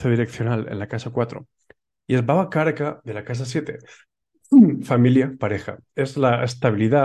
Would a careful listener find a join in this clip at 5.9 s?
no; 0 cuts

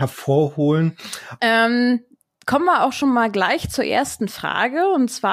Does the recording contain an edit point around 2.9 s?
no; 1 cut; at 1.4 s

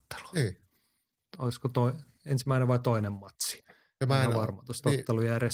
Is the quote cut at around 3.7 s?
no; 1 cut; at 1.2 s

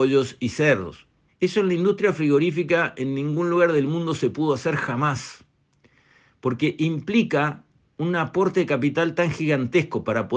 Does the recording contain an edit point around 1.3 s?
yes; 1 cut; at 1.3 s

